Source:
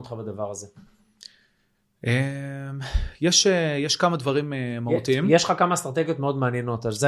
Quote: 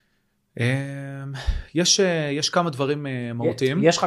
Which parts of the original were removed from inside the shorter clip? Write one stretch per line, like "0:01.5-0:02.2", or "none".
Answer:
none